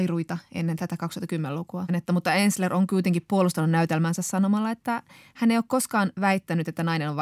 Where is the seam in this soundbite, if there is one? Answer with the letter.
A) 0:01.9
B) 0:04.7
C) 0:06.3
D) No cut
A